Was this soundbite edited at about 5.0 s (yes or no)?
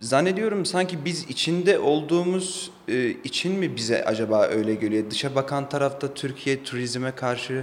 no